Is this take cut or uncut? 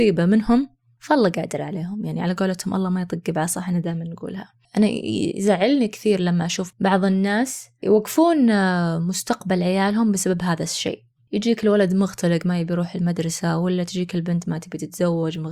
uncut